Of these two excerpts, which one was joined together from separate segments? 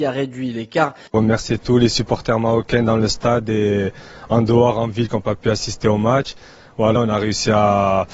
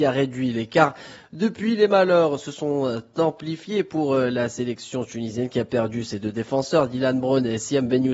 first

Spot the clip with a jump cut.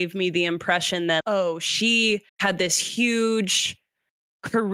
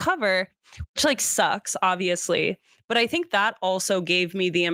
first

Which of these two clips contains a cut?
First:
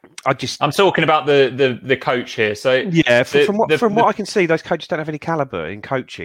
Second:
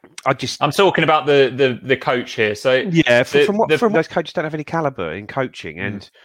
second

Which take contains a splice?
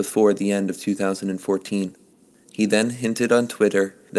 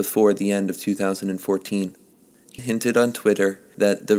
second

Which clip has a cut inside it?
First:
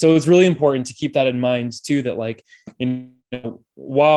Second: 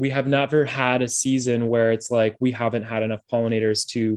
first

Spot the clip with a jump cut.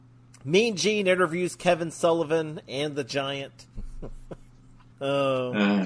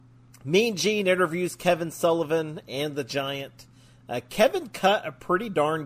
first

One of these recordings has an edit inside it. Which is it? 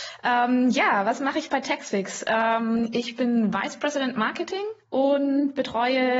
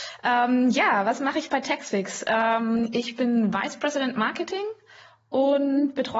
first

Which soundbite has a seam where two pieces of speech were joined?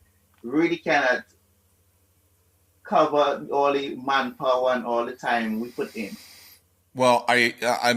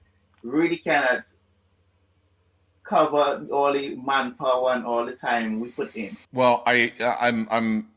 second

